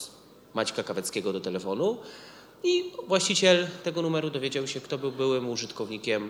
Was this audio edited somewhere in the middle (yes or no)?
no